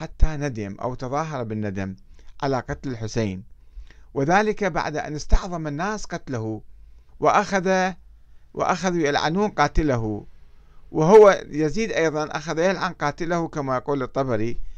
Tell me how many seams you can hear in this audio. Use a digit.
1